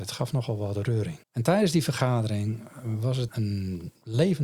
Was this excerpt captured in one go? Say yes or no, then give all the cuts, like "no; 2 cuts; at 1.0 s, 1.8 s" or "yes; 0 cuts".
no; 2 cuts; at 1.2 s, 3.3 s